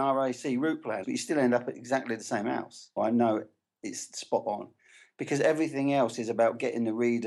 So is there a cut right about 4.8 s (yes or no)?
no